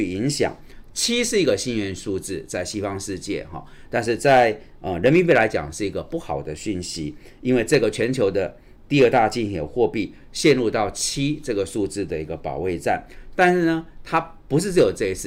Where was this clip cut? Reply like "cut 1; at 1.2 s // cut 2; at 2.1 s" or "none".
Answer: none